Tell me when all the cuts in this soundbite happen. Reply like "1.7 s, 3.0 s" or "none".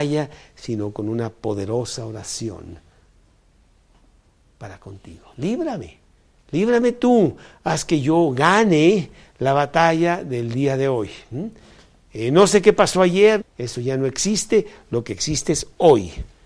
13.4 s